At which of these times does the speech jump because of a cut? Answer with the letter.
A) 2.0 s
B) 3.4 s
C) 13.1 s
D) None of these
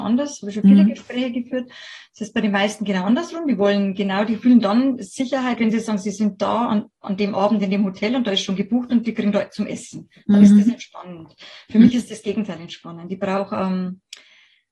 D